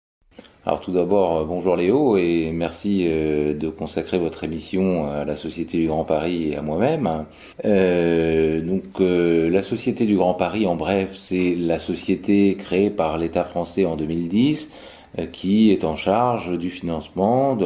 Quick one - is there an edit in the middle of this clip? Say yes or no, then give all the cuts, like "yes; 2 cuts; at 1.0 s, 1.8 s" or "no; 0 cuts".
no; 0 cuts